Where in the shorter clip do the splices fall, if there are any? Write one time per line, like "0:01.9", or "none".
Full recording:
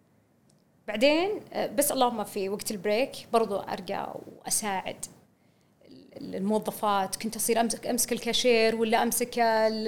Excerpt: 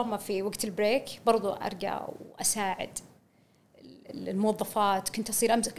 none